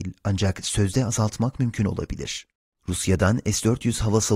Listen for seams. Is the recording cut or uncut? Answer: cut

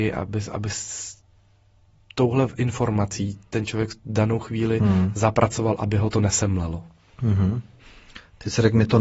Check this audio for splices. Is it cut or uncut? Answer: uncut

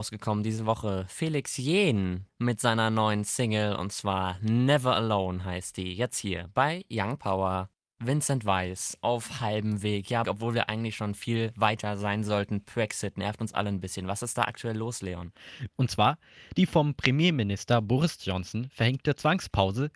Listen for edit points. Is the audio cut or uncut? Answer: cut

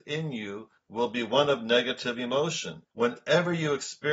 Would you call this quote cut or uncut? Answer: cut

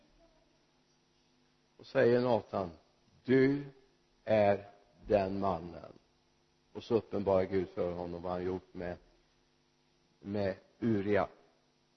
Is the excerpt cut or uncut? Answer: uncut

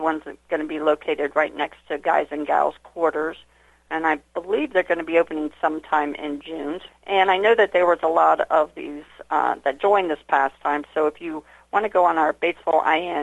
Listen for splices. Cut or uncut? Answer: cut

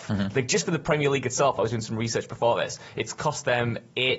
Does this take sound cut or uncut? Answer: uncut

